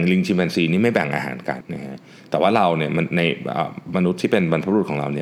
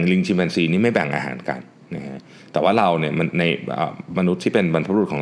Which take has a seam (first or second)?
first